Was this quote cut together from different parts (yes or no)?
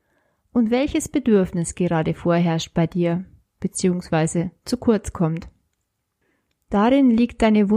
no